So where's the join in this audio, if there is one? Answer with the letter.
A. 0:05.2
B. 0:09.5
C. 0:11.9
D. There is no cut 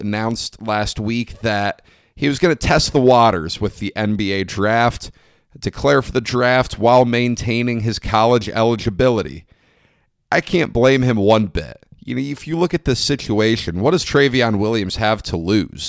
D